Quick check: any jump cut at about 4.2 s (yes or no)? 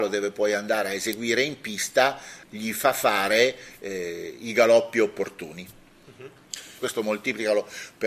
no